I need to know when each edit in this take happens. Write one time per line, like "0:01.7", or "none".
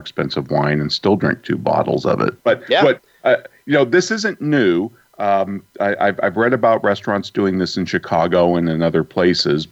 0:02.4